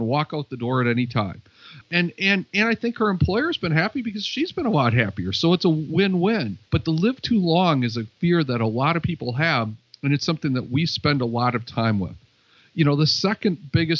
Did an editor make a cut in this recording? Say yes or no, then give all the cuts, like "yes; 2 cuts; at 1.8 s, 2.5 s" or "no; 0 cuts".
yes; 2 cuts; at 1.8 s, 6.7 s